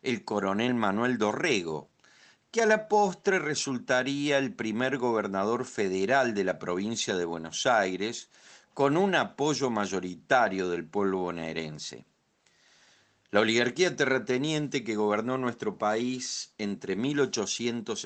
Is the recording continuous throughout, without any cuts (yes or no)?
yes